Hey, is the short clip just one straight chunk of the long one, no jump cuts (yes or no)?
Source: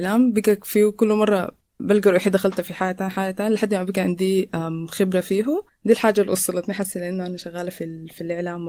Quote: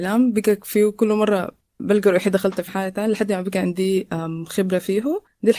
no